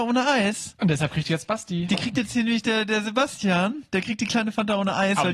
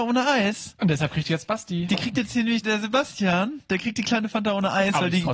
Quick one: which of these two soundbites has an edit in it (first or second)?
second